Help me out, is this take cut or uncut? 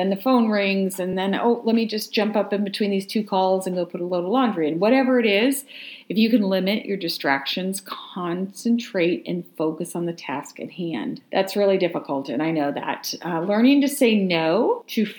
uncut